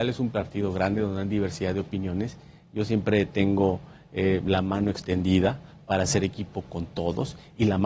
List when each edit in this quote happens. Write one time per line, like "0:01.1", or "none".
none